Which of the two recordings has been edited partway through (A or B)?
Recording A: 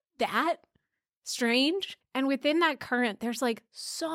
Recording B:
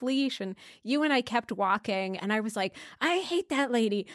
A